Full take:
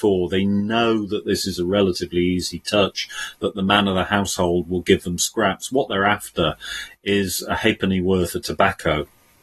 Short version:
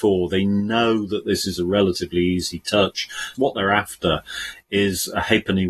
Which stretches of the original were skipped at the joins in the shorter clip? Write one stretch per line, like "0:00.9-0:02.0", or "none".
0:03.3-0:05.7